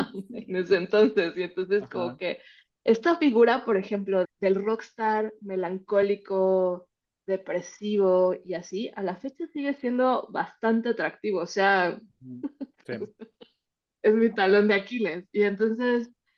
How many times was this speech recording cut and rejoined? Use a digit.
2